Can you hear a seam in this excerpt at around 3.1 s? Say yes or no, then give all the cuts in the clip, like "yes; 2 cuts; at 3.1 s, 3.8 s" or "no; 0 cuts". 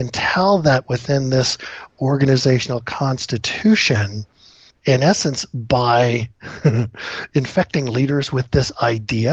no; 1 cut; at 4.7 s